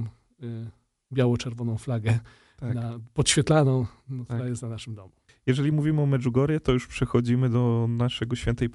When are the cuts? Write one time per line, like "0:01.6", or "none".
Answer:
0:05.3